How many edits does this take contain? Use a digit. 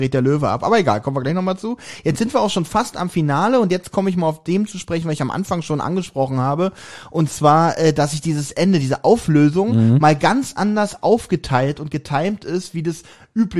0